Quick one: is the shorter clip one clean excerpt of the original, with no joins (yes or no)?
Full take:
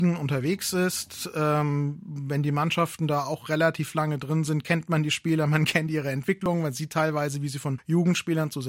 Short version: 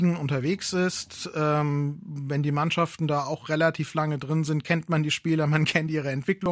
yes